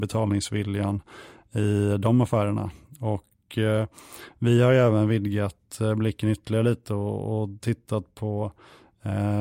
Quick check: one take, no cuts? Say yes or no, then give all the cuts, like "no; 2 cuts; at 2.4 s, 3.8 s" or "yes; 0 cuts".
yes; 0 cuts